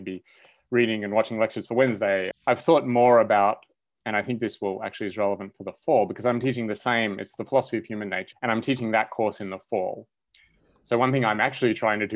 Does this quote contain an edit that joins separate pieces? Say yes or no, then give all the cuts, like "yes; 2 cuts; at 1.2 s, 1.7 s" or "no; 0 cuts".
yes; 2 cuts; at 2.3 s, 8.3 s